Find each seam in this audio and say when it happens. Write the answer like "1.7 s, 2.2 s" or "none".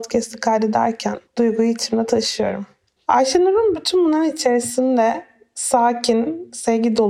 1.3 s, 3.0 s